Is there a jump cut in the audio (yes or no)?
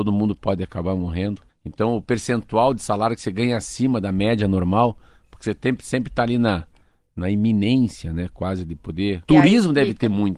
yes